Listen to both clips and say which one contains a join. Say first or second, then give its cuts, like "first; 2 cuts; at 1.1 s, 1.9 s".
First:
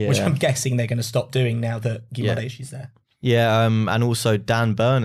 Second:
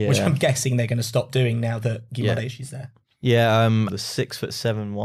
second; 1 cut; at 3.9 s